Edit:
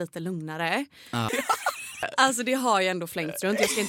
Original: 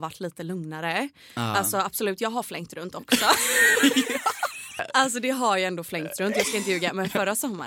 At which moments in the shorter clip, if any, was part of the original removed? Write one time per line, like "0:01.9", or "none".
0:01.3